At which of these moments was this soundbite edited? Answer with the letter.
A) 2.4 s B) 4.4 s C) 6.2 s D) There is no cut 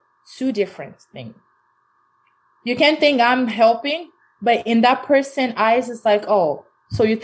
D